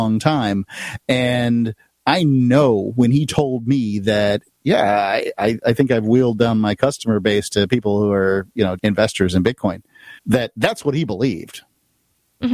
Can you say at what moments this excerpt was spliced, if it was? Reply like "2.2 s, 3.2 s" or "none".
8.8 s, 10.2 s